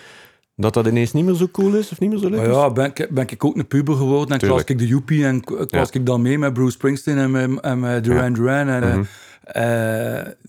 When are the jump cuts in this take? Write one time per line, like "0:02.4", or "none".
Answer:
0:08.8